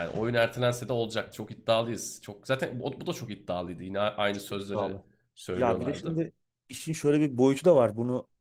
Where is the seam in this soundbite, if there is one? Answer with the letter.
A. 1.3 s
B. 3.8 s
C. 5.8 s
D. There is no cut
A